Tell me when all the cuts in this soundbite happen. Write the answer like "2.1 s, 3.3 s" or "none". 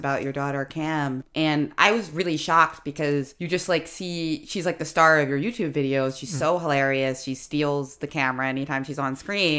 none